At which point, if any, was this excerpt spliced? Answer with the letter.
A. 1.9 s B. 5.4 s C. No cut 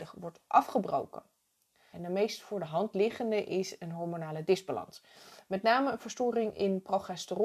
A